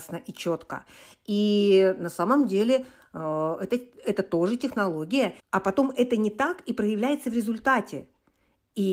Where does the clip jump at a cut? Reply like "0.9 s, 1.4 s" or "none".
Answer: 5.4 s